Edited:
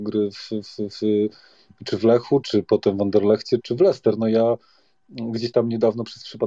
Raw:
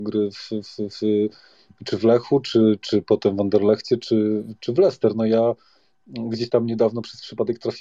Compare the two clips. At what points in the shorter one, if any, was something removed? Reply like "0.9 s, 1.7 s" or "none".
2.4 s, 3.6 s